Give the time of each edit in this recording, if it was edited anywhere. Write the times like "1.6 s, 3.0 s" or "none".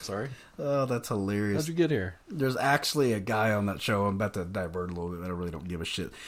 none